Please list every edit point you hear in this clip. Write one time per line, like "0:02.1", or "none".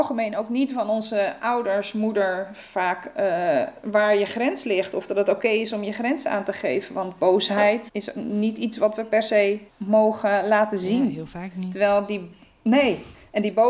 0:07.9
0:09.7